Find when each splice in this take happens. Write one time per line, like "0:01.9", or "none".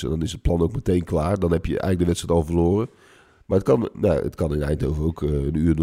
0:03.4